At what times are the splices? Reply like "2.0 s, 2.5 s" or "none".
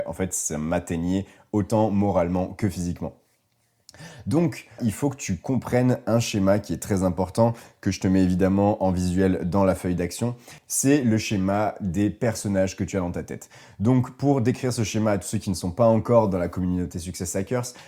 4.8 s